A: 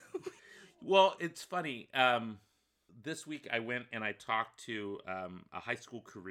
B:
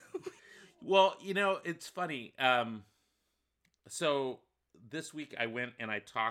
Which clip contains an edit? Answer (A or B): A